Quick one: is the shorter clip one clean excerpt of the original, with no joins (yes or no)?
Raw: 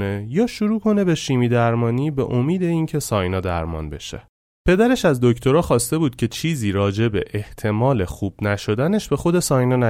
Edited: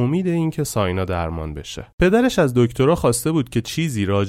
no